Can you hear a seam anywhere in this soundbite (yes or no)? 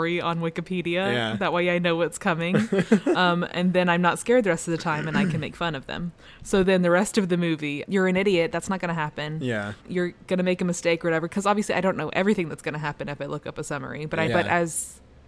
yes